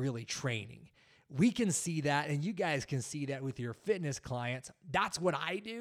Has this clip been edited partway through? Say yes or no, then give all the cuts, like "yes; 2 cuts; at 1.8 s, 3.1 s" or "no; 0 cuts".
no; 0 cuts